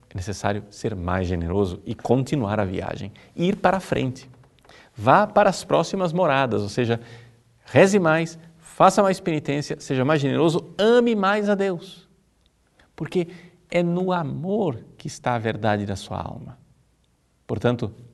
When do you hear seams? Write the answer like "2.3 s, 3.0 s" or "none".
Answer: none